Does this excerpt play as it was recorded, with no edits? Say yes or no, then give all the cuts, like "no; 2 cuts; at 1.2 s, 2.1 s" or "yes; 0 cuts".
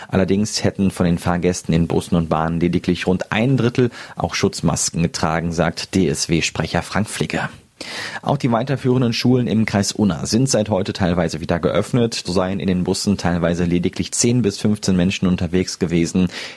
no; 1 cut; at 12.2 s